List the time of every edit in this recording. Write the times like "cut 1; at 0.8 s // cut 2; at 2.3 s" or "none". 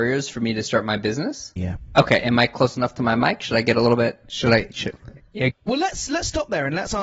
cut 1; at 1.6 s // cut 2; at 5.5 s